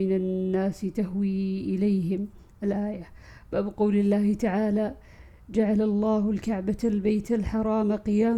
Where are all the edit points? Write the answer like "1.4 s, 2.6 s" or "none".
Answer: none